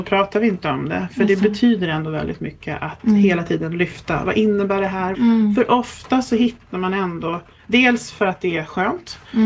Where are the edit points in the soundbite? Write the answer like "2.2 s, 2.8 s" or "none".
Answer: 5.1 s